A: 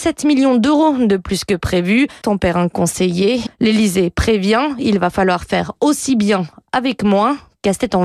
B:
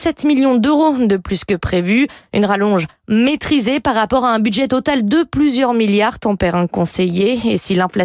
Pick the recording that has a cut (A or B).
A